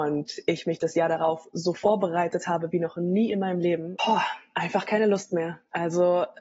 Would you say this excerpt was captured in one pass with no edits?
no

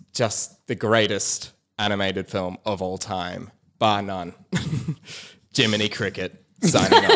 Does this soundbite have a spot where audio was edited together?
no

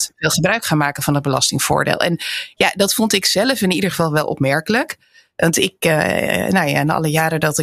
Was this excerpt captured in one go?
yes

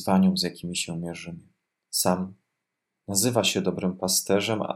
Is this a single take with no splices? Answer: no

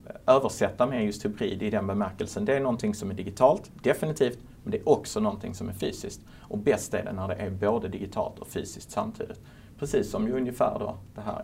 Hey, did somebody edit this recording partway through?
no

